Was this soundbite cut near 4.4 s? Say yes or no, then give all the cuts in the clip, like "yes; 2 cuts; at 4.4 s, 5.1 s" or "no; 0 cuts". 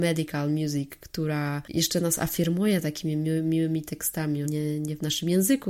yes; 1 cut; at 4.4 s